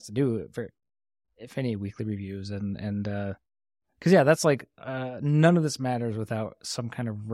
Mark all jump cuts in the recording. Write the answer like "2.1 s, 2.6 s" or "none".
none